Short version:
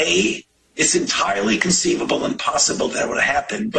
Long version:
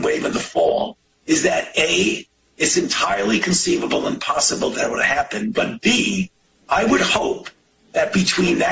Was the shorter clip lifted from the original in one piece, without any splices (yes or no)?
yes